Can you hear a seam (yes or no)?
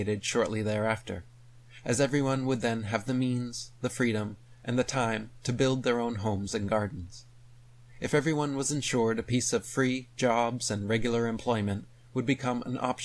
yes